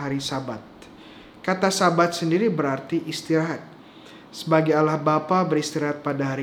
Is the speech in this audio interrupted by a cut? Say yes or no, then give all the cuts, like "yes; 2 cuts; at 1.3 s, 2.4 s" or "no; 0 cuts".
no; 0 cuts